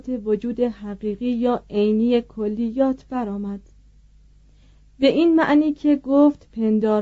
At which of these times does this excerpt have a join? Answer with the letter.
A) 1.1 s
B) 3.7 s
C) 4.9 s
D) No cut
D